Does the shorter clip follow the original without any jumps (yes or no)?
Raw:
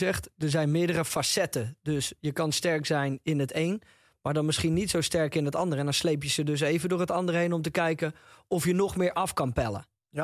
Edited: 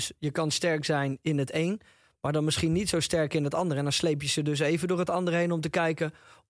yes